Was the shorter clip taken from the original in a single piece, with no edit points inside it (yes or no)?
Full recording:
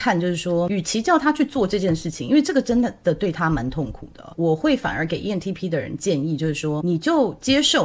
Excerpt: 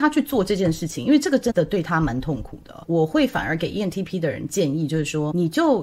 no